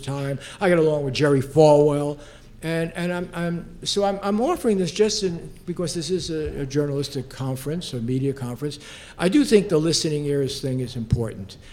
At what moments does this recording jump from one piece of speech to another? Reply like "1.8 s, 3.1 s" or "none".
none